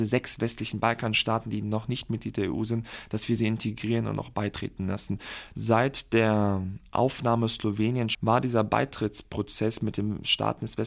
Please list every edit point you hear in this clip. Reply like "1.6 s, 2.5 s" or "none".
5.5 s, 8.1 s